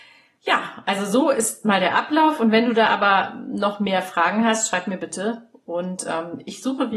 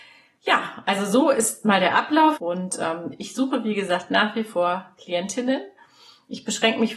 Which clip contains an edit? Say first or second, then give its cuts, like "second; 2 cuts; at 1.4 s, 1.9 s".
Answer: second; 1 cut; at 2.4 s